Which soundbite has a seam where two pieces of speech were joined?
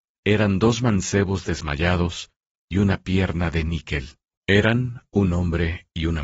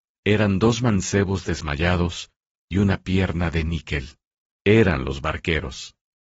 first; 1 cut; at 4.3 s

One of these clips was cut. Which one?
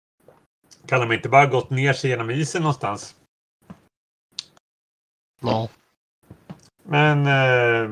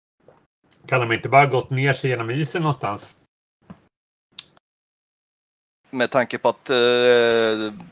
first; 1 cut; at 5.3 s

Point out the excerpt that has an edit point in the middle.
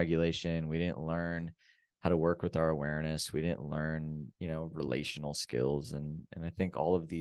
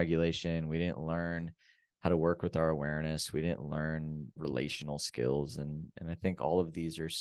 second; 1 cut; at 4.4 s

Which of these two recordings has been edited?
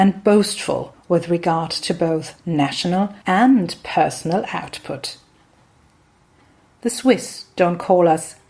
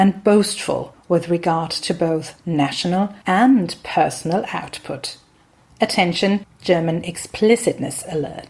second; 1 cut; at 5.7 s

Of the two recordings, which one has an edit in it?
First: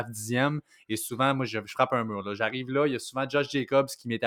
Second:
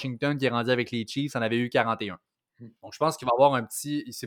second; 1 cut; at 2.8 s

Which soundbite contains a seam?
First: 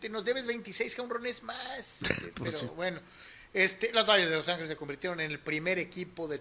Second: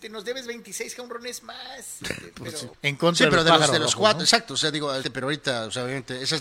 second; 2 cuts; at 2.7 s, 5.0 s

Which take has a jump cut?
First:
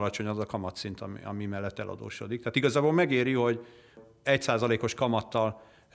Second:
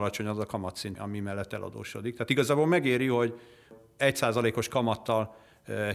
second; 1 cut; at 1.0 s

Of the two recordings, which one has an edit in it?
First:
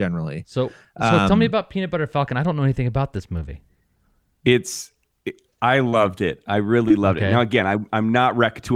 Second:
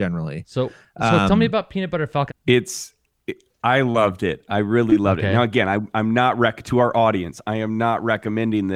second; 1 cut; at 2.3 s

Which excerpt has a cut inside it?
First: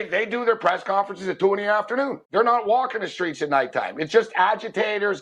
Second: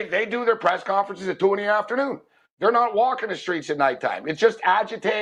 first; 1 cut; at 2.2 s

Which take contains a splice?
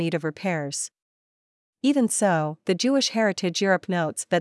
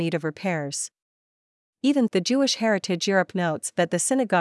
second; 1 cut; at 2.1 s

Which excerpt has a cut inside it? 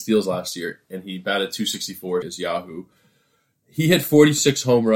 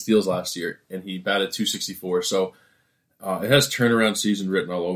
first; 1 cut; at 2.2 s

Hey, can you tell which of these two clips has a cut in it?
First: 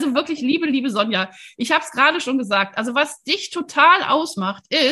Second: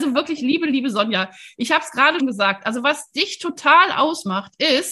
second; 1 cut; at 2.2 s

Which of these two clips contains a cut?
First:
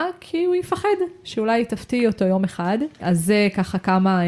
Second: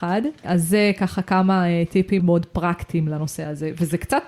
second; 1 cut; at 2.2 s

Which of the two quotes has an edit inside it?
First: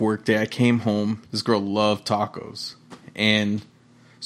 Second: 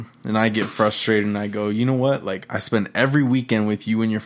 first; 1 cut; at 1.2 s

